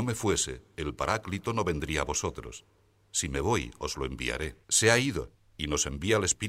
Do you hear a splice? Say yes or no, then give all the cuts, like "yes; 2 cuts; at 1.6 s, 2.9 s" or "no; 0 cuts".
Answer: yes; 1 cut; at 4.6 s